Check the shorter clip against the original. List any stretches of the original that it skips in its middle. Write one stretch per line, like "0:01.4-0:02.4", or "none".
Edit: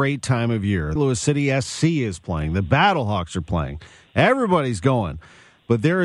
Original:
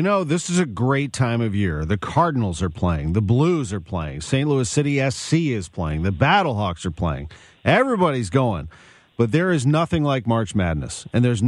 0:01.9-0:04.4